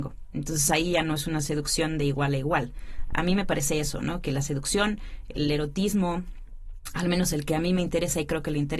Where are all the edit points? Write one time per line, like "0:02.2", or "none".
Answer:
none